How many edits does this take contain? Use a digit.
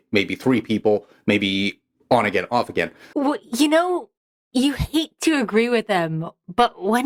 1